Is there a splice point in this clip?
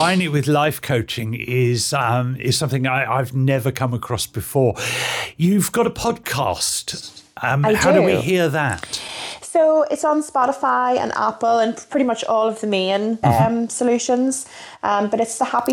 yes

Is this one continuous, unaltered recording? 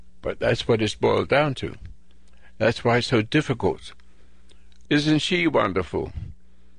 no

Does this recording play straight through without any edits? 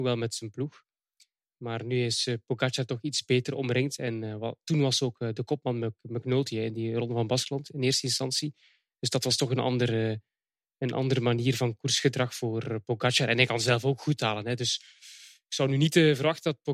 yes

